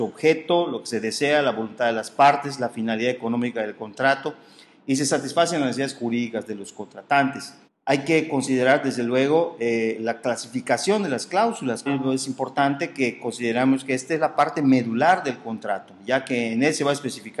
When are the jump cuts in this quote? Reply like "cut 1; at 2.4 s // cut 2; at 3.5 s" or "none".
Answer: cut 1; at 7.6 s // cut 2; at 11.9 s